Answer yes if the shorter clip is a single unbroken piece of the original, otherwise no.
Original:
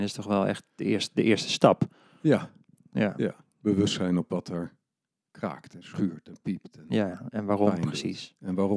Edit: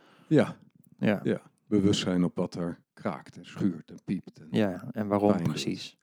no